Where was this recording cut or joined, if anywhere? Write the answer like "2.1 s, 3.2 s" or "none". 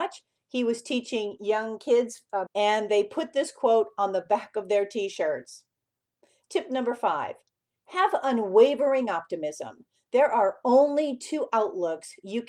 2.5 s